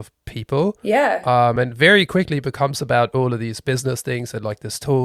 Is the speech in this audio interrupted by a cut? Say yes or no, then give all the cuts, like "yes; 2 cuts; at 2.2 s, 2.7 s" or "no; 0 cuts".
no; 0 cuts